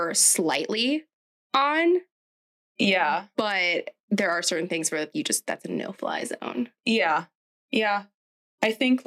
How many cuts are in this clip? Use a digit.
1